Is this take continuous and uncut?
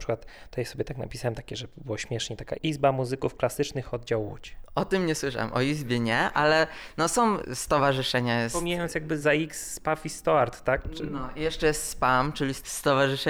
no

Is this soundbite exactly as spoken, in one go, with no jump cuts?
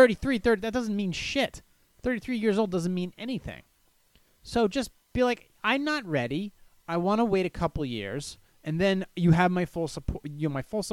yes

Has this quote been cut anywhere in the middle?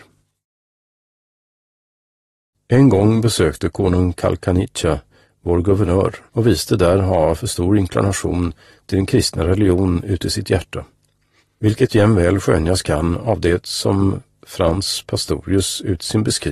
yes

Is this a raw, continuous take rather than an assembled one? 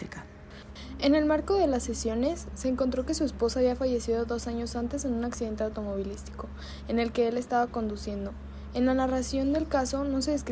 yes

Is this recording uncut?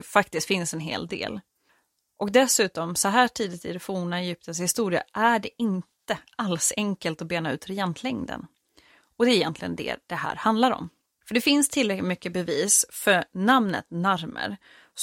yes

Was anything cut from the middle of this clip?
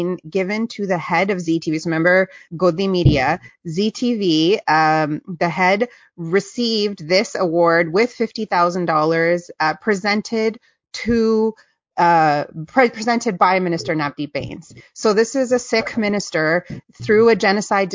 yes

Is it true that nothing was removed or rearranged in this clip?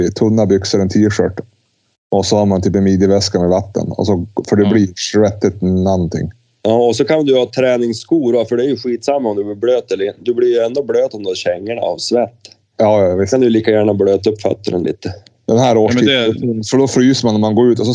yes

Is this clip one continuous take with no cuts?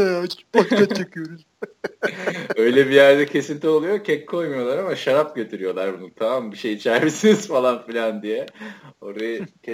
yes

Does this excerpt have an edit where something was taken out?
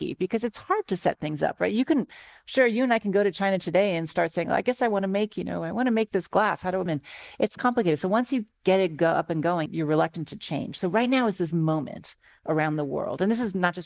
yes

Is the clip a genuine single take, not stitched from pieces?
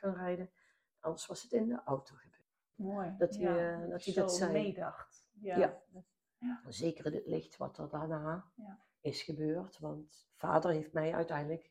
no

